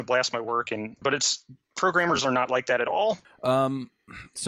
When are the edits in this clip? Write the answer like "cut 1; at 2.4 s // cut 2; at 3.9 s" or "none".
cut 1; at 1.0 s // cut 2; at 3.2 s

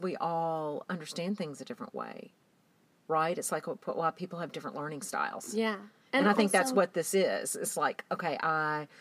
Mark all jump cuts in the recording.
none

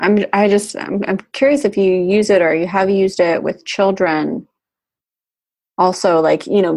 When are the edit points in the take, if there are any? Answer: none

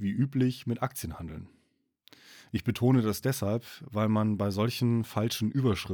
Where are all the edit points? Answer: none

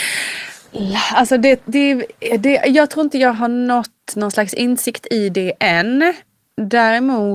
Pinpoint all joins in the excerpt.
none

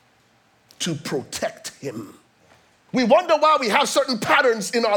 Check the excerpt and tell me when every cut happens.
cut 1; at 2.9 s

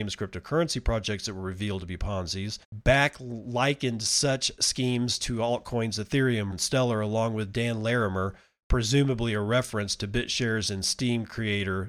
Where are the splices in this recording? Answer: cut 1; at 2.6 s // cut 2; at 6.5 s

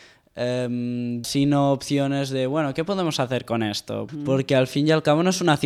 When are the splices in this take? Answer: cut 1; at 1.2 s // cut 2; at 4.1 s

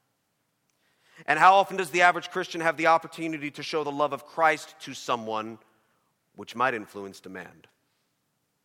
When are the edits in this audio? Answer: none

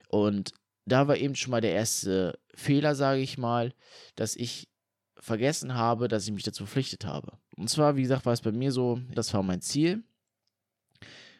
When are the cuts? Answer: cut 1; at 7.5 s // cut 2; at 9.1 s

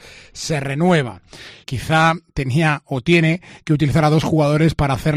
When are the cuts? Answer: cut 1; at 1.6 s

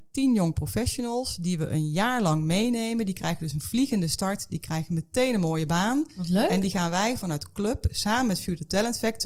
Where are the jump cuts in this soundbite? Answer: none

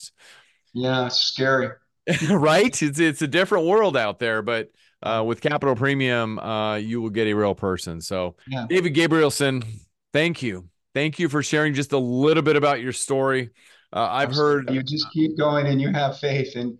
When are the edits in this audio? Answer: cut 1; at 8.4 s // cut 2; at 14.7 s

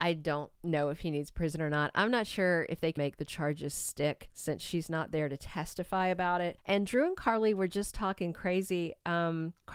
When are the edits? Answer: cut 1; at 3.0 s // cut 2; at 6.6 s

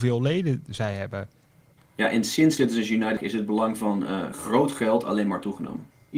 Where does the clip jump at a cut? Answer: cut 1; at 1.8 s

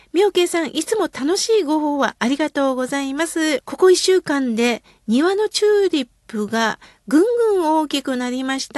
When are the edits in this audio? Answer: cut 1; at 3.6 s

